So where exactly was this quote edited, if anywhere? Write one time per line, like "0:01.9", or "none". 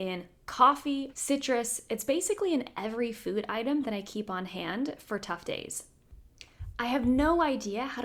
0:01.1